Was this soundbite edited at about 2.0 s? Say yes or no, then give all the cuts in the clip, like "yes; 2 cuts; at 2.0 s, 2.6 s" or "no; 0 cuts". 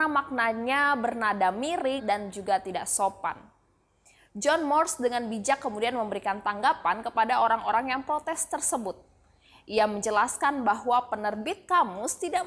yes; 1 cut; at 2.0 s